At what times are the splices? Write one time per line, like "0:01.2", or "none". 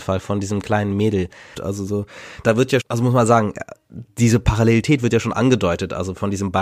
0:01.5
0:02.8